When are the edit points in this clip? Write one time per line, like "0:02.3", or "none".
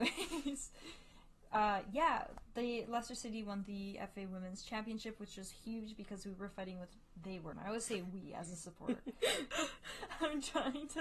0:07.5
0:09.5